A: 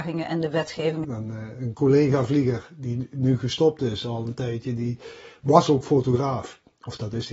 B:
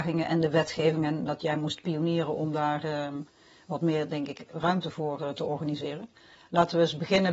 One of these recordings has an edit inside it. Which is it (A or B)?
A